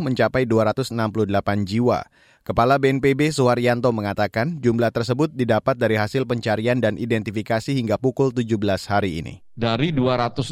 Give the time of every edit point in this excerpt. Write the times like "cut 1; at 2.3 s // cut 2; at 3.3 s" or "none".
cut 1; at 9.4 s